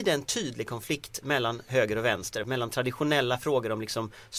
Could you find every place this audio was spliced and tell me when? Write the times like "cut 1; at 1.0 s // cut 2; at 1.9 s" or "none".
cut 1; at 2.4 s

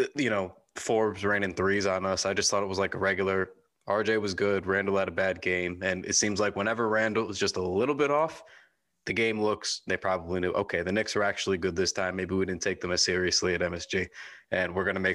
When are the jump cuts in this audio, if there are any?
cut 1; at 9.9 s

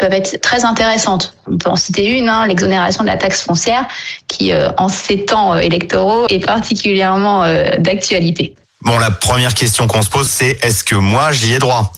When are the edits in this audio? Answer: cut 1; at 6.3 s // cut 2; at 10.3 s

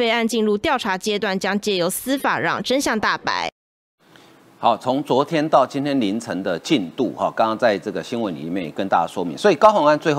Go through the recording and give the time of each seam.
none

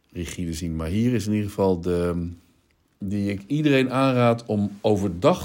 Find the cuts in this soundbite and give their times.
cut 1; at 2.9 s

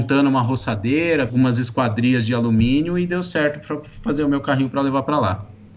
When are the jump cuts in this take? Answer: cut 1; at 1.3 s

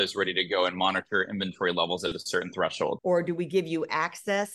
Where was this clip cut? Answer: cut 1; at 3.0 s

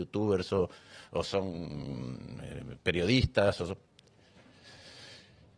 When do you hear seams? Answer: none

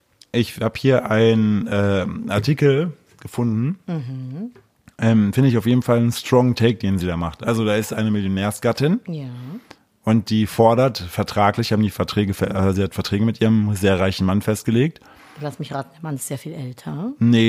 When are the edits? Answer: none

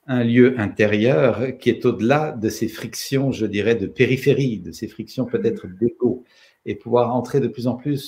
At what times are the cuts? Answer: none

